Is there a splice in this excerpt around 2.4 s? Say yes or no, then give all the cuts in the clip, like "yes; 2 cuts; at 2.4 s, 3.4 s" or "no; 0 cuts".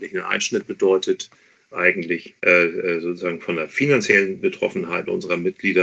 yes; 1 cut; at 2.4 s